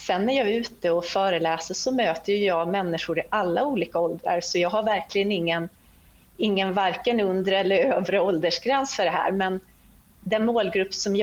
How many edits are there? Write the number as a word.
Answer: zero